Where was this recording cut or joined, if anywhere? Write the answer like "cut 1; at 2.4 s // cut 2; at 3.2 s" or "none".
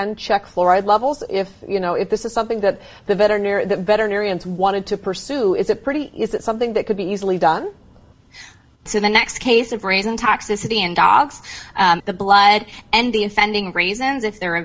cut 1; at 8.9 s // cut 2; at 12.0 s